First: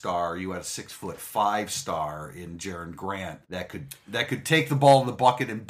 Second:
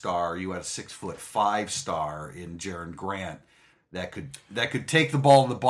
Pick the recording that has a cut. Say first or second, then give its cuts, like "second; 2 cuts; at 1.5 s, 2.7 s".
first; 1 cut; at 3.4 s